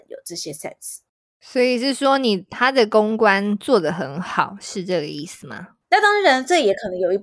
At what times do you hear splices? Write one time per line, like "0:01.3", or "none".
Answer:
0:05.8